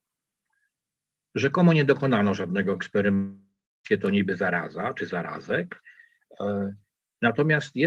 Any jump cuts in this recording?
no; 0 cuts

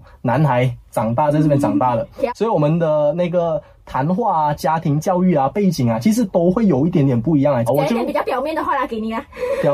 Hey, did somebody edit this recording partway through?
yes; 2 cuts; at 2.3 s, 7.7 s

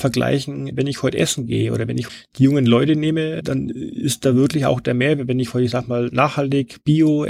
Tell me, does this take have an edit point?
no; 0 cuts

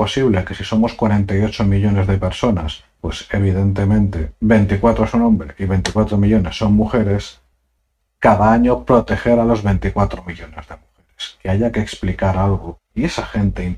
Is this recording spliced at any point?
yes; 2 cuts; at 3.0 s, 12.8 s

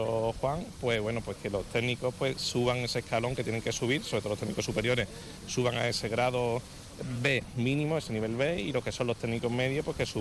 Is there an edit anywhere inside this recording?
no; 0 cuts

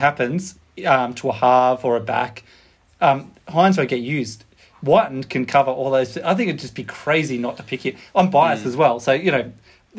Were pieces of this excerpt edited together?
no; 0 cuts

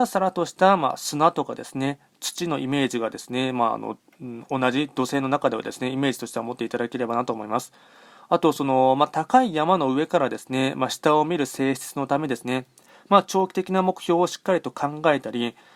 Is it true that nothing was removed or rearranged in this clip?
yes; 0 cuts

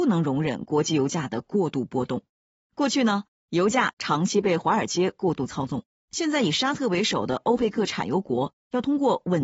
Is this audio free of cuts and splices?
yes; 0 cuts

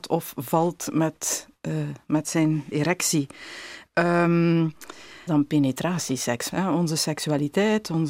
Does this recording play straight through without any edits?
no; 3 cuts; at 2.7 s, 5.3 s, 6.5 s

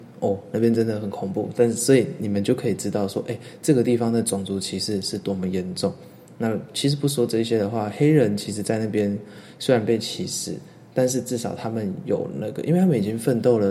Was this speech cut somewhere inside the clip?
yes; 1 cut; at 1.5 s

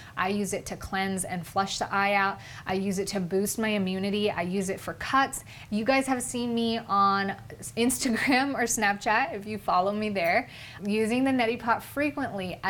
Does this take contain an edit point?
yes; 2 cuts; at 5.7 s, 10.8 s

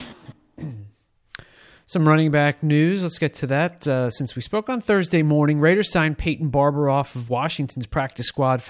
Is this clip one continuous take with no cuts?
yes; 0 cuts

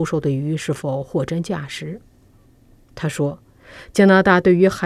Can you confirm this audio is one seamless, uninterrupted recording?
yes; 0 cuts

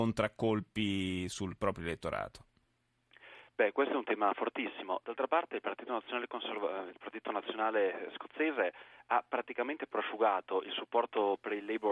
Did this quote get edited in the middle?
no; 0 cuts

